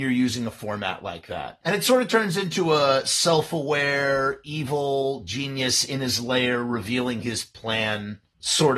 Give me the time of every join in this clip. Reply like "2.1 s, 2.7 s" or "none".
1.6 s